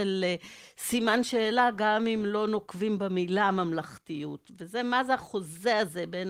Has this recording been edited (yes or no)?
no